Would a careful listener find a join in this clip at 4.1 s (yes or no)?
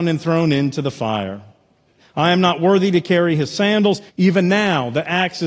yes